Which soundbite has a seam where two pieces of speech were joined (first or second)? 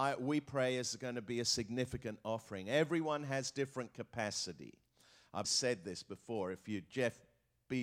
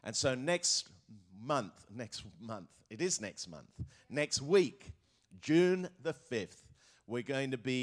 first